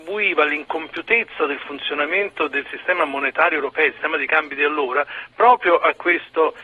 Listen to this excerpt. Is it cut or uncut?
uncut